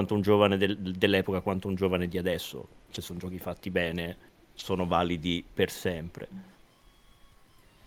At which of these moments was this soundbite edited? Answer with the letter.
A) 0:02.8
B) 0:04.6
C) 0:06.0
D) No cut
D